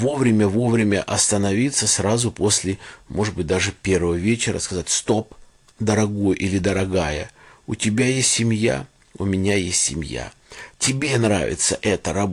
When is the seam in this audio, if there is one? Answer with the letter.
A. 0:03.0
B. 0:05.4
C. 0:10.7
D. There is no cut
C